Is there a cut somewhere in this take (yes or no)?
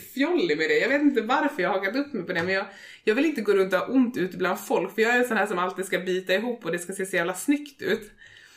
no